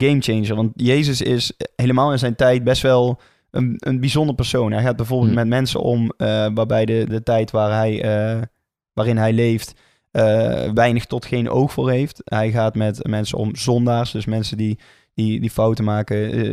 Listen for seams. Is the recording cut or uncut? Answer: cut